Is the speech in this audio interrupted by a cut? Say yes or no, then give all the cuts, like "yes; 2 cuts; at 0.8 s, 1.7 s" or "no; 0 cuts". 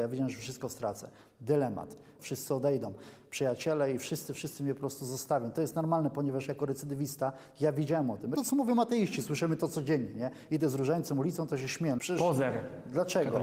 yes; 3 cuts; at 2.2 s, 8.4 s, 12.0 s